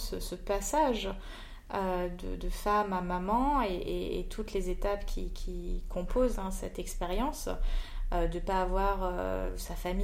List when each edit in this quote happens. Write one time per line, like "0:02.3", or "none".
none